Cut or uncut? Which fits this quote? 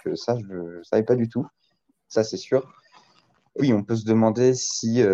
cut